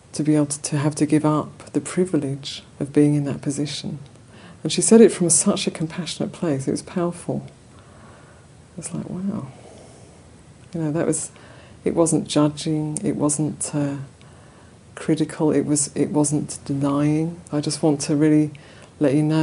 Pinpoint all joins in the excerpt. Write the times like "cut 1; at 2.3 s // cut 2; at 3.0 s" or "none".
cut 1; at 2.7 s // cut 2; at 17.5 s

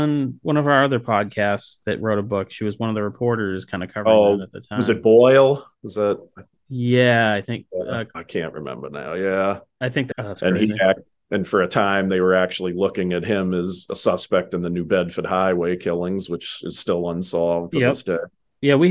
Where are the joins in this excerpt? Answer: cut 1; at 8.1 s // cut 2; at 10.1 s

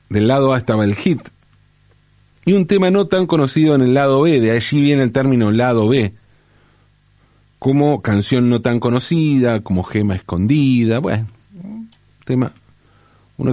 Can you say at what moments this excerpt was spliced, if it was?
none

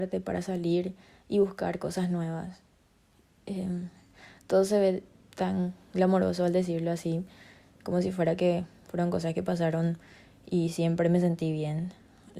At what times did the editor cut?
none

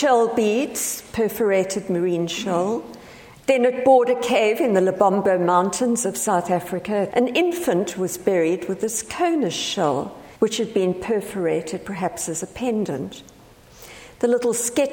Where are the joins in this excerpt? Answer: cut 1; at 3.3 s // cut 2; at 7.1 s // cut 3; at 10.4 s

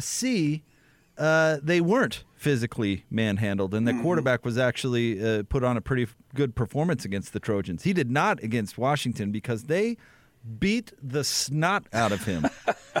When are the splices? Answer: none

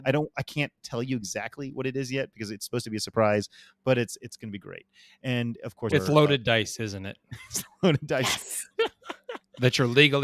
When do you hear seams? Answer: cut 1; at 4.2 s // cut 2; at 5.9 s // cut 3; at 8.7 s

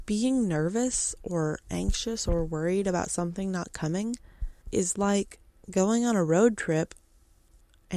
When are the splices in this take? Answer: cut 1; at 4.6 s

